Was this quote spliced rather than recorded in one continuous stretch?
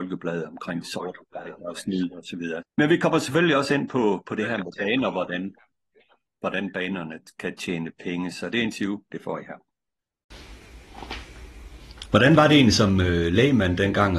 yes; 2 cuts; at 2.6 s, 12.1 s

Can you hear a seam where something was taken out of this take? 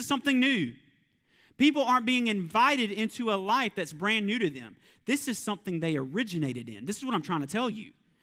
no; 0 cuts

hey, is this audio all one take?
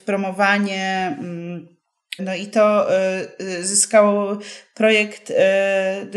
no; 1 cut; at 2.2 s

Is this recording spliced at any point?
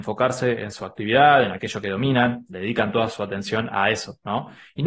no; 0 cuts

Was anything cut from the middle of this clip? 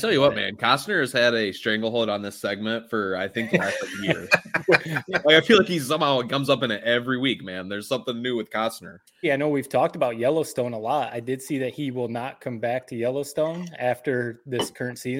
yes; 1 cut; at 9.2 s

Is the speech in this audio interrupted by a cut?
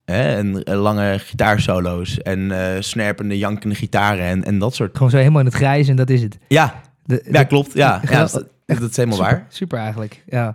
yes; 1 cut; at 4.9 s

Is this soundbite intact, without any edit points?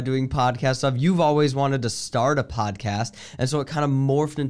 yes; 0 cuts

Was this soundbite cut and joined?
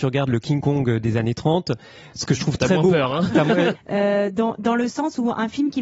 yes; 1 cut; at 3.7 s

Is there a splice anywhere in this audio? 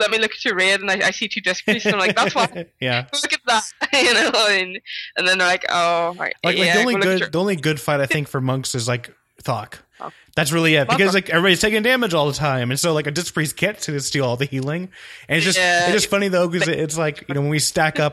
no; 0 cuts

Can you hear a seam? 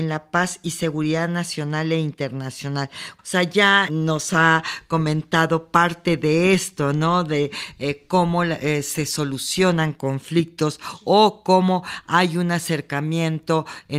yes; 1 cut; at 3.2 s

